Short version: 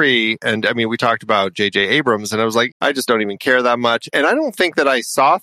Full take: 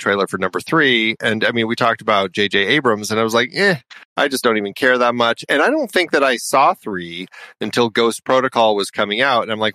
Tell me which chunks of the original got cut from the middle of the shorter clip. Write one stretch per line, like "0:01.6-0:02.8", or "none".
0:03.5-0:04.1